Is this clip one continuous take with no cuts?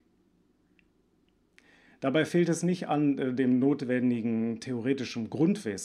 yes; 0 cuts

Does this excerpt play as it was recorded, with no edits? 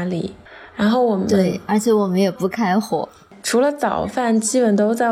yes; 0 cuts

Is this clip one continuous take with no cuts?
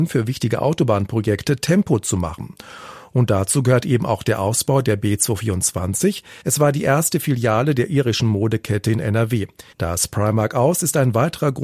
no; 2 cuts; at 6.4 s, 9.7 s

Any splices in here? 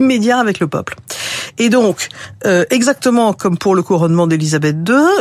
no; 0 cuts

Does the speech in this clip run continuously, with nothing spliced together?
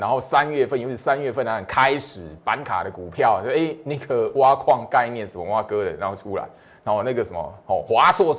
yes; 0 cuts

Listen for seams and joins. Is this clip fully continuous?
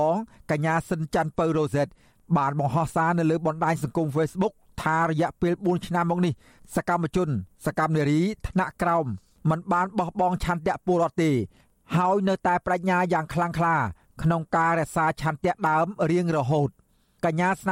yes; 0 cuts

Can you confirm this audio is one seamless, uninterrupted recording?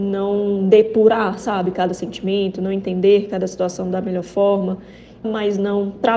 no; 1 cut; at 5.2 s

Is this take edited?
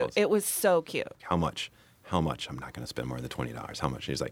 yes; 1 cut; at 1.2 s

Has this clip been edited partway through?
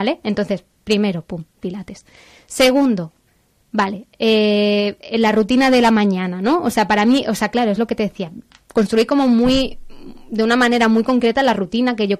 no; 0 cuts

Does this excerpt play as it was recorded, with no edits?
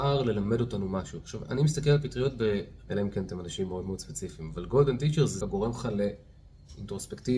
no; 2 cuts; at 2.9 s, 5.4 s

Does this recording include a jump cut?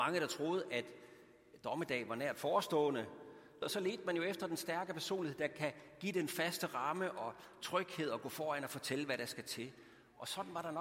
yes; 1 cut; at 3.6 s

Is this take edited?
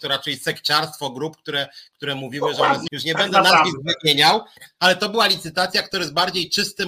yes; 1 cut; at 2.9 s

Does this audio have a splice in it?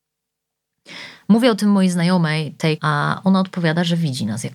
yes; 1 cut; at 2.8 s

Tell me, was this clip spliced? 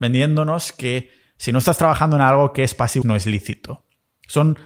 yes; 1 cut; at 3.0 s

